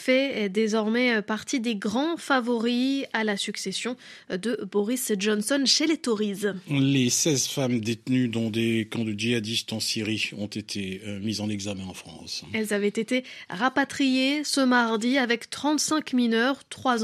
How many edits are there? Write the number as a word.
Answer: zero